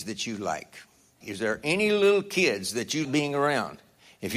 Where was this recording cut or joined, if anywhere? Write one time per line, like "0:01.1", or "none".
0:01.2
0:03.0